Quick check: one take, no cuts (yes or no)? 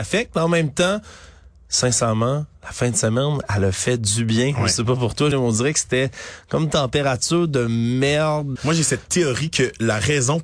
no